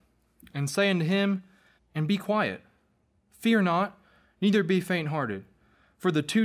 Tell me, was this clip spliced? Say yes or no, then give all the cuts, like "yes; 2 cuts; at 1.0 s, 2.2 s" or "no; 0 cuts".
yes; 1 cut; at 1.8 s